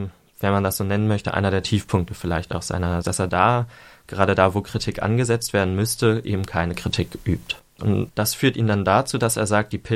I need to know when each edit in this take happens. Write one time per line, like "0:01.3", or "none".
0:03.0
0:07.8